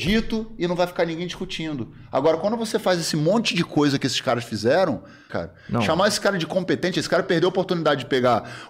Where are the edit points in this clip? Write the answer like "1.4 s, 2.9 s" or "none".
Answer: 5.3 s, 6.9 s